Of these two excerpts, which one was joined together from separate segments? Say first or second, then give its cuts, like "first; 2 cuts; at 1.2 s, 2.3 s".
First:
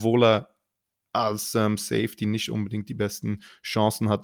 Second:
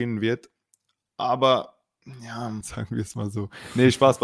second; 1 cut; at 2.6 s